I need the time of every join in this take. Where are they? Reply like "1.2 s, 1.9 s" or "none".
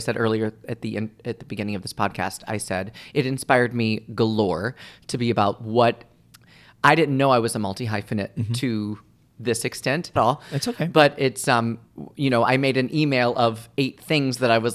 10.2 s